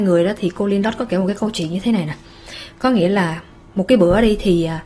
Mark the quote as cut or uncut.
uncut